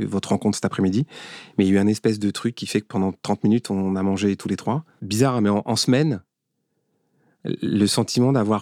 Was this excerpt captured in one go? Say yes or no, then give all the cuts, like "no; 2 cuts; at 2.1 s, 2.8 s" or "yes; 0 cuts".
no; 1 cut; at 5.0 s